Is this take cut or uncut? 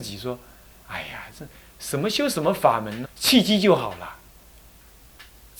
cut